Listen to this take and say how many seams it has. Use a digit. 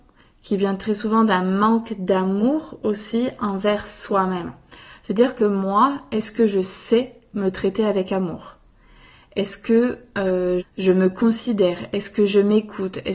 1